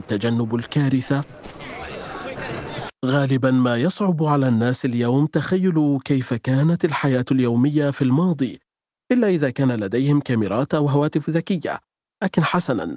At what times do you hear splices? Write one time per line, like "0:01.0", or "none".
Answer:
0:02.9